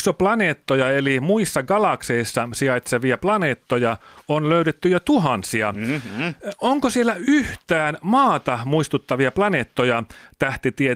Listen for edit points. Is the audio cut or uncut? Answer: uncut